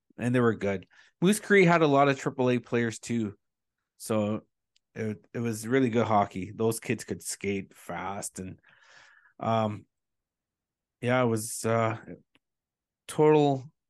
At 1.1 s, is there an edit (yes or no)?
no